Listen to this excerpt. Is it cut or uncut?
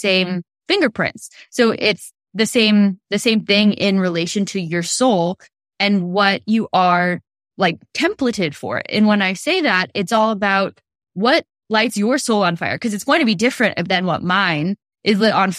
uncut